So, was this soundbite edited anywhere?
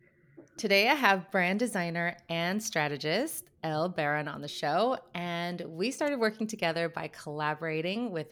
no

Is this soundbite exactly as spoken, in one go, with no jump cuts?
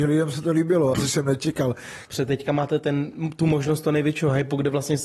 no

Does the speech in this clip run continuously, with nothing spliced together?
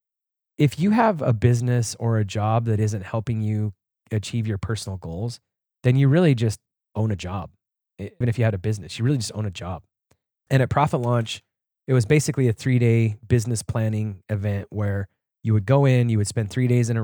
no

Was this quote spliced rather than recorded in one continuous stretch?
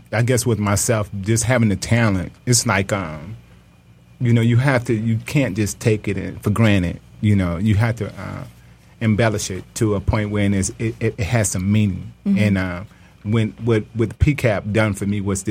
no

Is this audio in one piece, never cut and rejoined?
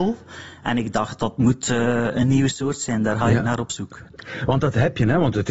no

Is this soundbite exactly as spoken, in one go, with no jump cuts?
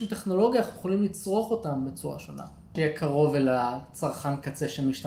no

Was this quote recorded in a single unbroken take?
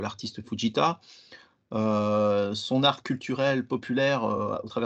yes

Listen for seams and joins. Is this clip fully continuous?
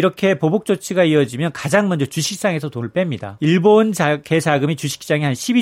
no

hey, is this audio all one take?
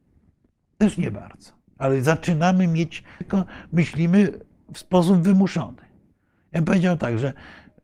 no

